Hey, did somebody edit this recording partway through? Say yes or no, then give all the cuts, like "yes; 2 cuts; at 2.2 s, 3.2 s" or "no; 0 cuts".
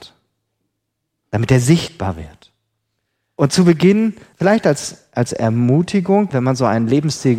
yes; 2 cuts; at 4.3 s, 6.3 s